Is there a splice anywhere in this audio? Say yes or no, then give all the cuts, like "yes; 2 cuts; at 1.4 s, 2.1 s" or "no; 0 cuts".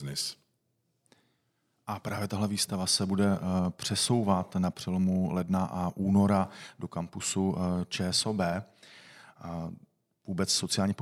no; 0 cuts